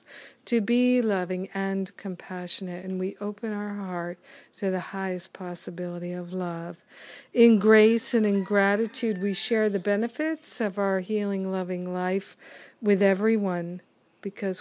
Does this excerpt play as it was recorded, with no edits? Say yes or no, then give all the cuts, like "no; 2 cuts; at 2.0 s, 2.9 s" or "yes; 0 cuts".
yes; 0 cuts